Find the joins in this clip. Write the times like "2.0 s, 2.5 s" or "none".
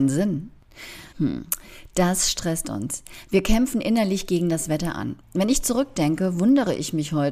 1.1 s, 5.2 s